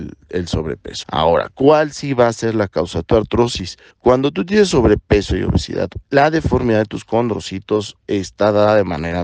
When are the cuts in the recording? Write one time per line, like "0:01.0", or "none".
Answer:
0:01.0
0:03.9
0:06.0